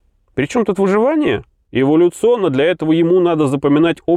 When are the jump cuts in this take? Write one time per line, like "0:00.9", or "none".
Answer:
0:01.7